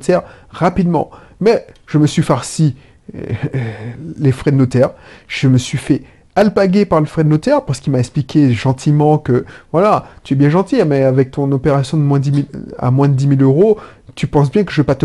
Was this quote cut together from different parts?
no; 0 cuts

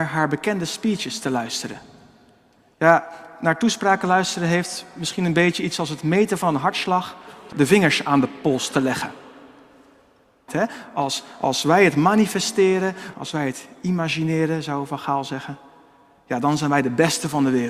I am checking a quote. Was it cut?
yes; 3 cuts; at 7.5 s, 10.5 s, 13.1 s

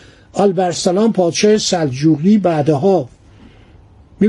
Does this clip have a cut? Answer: no; 0 cuts

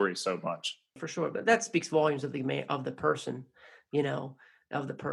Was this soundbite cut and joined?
yes; 1 cut; at 1.0 s

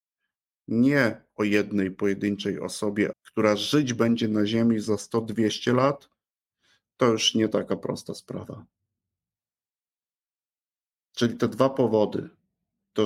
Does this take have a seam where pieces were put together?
yes; 1 cut; at 3.1 s

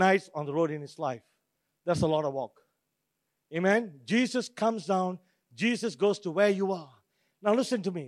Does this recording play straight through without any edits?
yes; 0 cuts

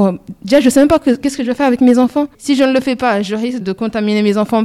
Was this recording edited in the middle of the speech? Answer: yes; 2 cuts; at 2.3 s, 3.6 s

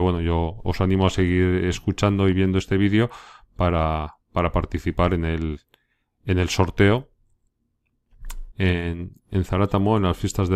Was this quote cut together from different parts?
yes; 1 cut; at 8.5 s

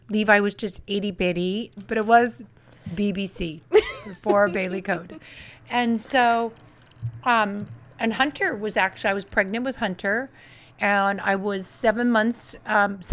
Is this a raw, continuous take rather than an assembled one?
no; 1 cut; at 1.8 s

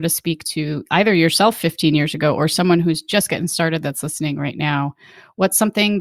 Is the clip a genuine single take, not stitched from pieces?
yes; 0 cuts

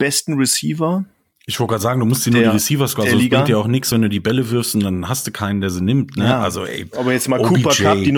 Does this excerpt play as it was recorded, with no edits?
yes; 0 cuts

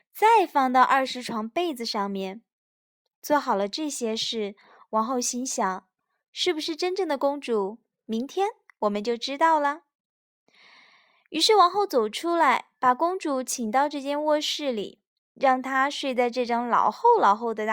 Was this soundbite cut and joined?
no; 0 cuts

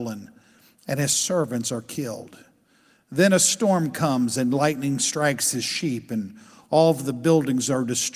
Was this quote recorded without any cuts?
yes; 0 cuts

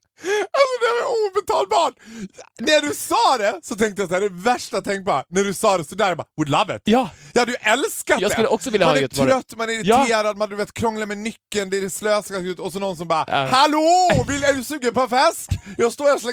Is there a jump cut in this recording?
no; 0 cuts

